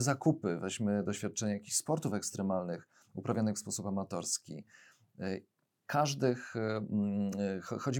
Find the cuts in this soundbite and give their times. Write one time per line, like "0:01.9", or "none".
none